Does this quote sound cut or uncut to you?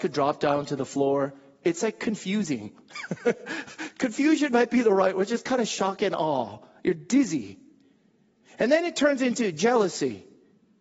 uncut